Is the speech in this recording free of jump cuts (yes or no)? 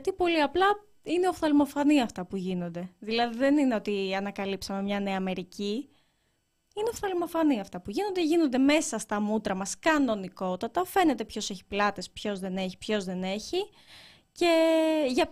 no